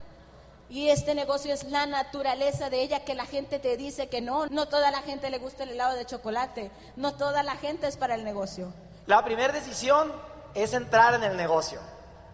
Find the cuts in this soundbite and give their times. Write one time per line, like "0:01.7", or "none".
0:04.5
0:09.0